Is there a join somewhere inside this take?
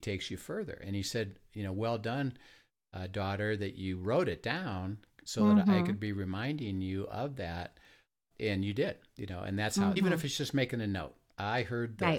yes; 2 cuts; at 8.3 s, 10.0 s

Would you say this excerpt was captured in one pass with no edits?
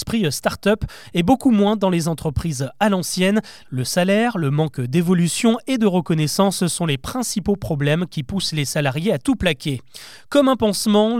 no; 1 cut; at 3.6 s

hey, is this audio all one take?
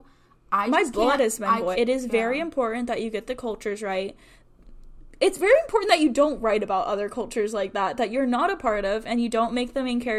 no; 1 cut; at 1.7 s

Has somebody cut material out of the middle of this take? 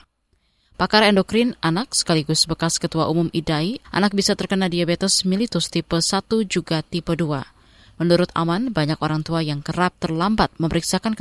yes; 1 cut; at 3.8 s

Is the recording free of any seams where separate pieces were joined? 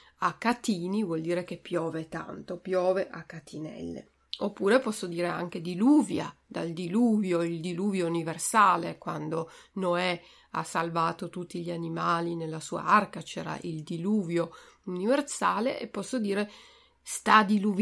yes; 0 cuts

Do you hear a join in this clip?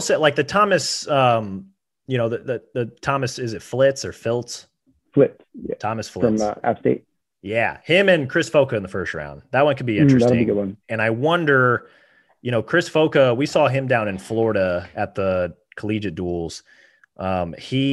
no; 0 cuts

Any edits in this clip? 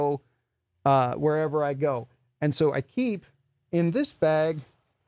no; 0 cuts

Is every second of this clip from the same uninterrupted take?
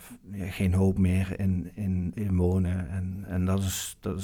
no; 1 cut; at 2.1 s

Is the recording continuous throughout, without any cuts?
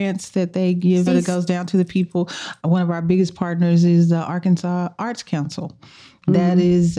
no; 1 cut; at 1.1 s

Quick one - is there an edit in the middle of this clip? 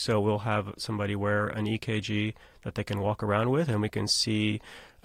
no; 0 cuts

